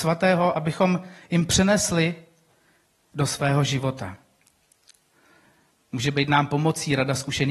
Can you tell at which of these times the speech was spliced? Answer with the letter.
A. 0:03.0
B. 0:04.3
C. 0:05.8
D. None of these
D